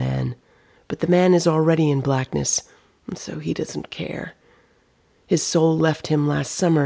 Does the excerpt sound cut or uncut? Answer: uncut